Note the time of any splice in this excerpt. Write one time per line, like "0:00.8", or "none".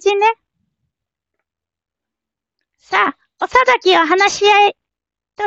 none